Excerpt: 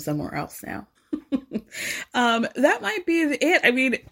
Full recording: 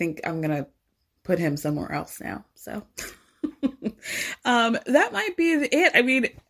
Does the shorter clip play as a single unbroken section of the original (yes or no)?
no